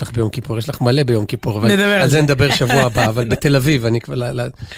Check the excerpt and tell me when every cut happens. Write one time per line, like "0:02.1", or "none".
none